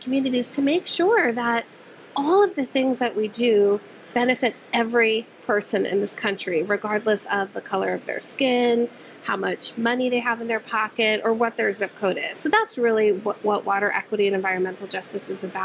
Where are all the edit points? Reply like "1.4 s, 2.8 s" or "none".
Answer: none